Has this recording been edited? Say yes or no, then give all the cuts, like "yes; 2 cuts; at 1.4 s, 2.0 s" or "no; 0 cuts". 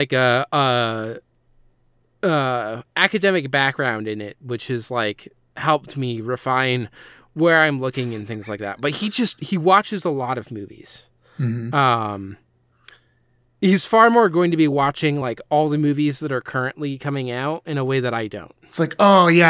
no; 0 cuts